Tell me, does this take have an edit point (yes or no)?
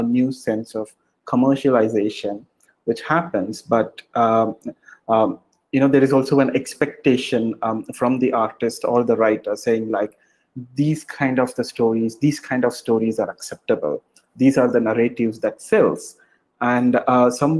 no